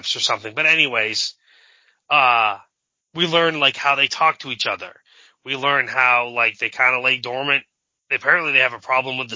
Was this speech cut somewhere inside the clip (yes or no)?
no